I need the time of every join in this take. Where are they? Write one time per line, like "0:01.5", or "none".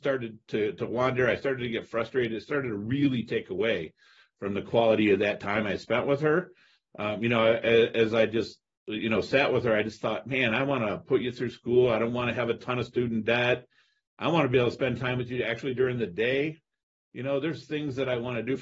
none